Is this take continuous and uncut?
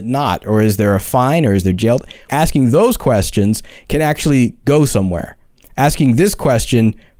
no; 1 cut; at 2.3 s

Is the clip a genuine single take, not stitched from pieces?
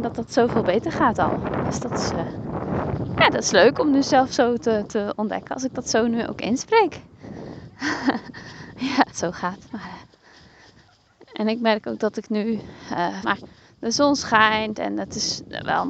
no; 2 cuts; at 9.1 s, 13.2 s

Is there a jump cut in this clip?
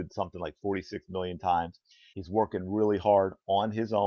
yes; 1 cut; at 2.1 s

